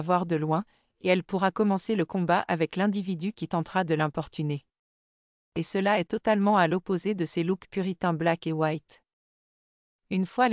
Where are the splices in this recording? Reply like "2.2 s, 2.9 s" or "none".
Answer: none